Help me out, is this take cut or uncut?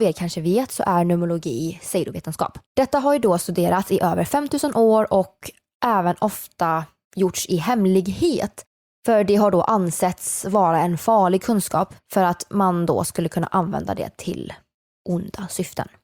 cut